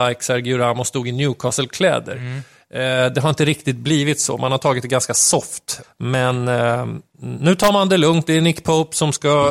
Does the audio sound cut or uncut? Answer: cut